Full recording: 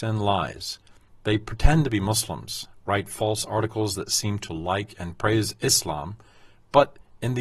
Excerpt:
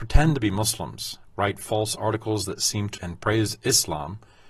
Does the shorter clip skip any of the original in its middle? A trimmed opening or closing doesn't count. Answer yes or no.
yes